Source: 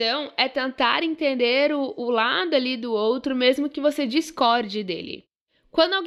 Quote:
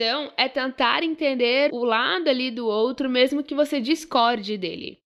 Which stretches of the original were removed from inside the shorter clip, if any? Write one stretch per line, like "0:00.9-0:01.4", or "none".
0:01.7-0:01.9